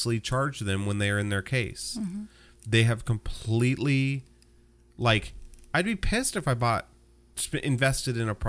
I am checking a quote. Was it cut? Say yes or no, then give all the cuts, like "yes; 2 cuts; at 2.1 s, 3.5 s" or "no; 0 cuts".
no; 0 cuts